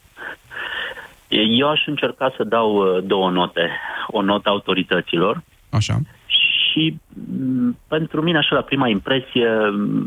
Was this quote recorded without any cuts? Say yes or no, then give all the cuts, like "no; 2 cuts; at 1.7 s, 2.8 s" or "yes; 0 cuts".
yes; 0 cuts